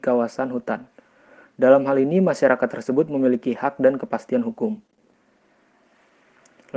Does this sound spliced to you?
no; 0 cuts

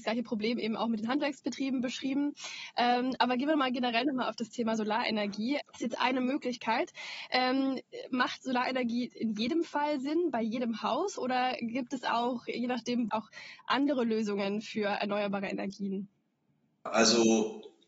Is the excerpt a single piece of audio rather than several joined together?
no; 2 cuts; at 5.6 s, 13.1 s

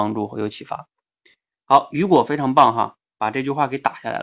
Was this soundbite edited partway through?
no; 0 cuts

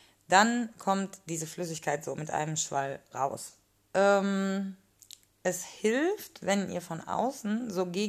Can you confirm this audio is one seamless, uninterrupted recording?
no; 2 cuts; at 3.8 s, 5.4 s

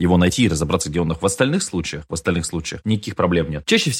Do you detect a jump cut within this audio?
yes; 1 cut; at 2.8 s

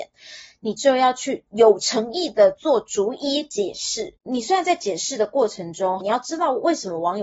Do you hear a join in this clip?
yes; 2 cuts; at 4.2 s, 6.0 s

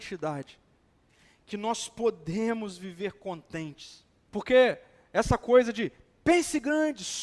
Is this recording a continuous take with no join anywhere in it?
no; 1 cut; at 4.3 s

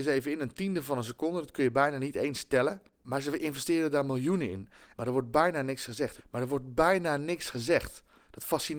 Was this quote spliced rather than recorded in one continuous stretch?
yes; 2 cuts; at 4.9 s, 6.2 s

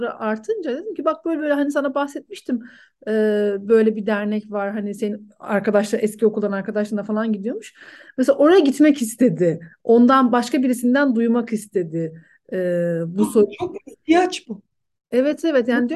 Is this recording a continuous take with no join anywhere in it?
yes; 0 cuts

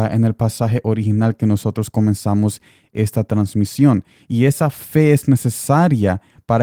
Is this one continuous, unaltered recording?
yes; 0 cuts

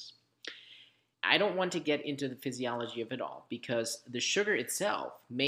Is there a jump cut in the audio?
yes; 1 cut; at 1.1 s

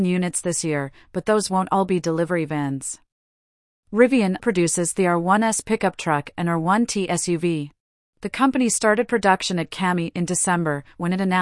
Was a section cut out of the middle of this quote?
yes; 2 cuts; at 4.4 s, 8.1 s

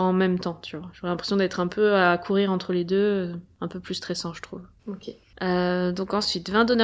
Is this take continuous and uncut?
yes; 0 cuts

